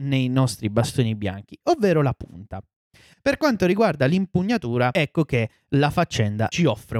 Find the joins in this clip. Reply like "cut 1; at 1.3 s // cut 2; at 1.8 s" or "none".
cut 1; at 3.1 s